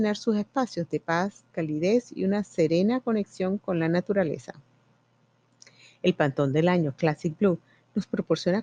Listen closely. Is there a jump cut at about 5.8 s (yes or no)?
no